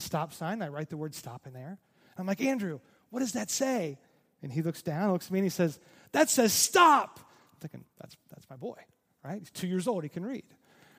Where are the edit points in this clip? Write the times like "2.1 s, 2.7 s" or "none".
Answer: none